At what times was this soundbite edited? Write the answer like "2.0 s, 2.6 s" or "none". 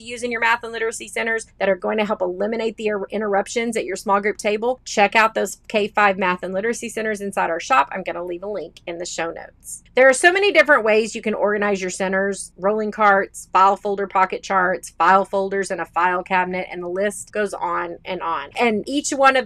9.9 s, 18.5 s